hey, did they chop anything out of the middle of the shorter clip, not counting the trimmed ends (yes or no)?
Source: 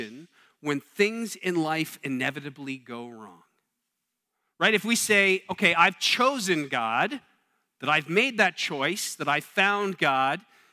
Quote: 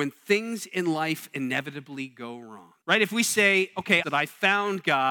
yes